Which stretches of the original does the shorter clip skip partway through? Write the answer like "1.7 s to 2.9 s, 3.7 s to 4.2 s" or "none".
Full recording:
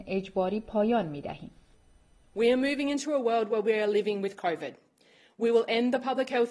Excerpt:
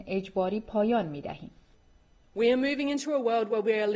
none